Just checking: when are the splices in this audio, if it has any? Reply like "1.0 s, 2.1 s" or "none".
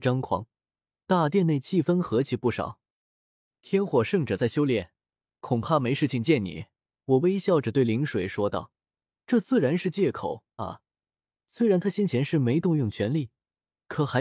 7.0 s, 10.6 s